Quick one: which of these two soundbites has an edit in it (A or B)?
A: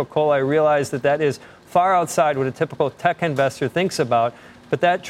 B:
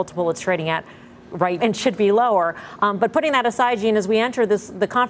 B